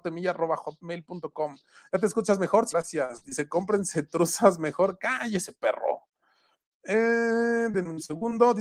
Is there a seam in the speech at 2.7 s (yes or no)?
yes